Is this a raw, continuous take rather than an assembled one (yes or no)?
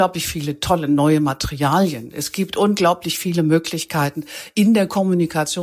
yes